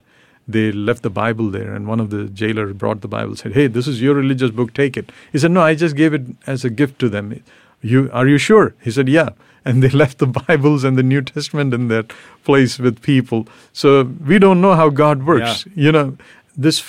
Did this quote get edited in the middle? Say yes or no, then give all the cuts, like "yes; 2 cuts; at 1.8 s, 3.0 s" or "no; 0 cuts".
no; 0 cuts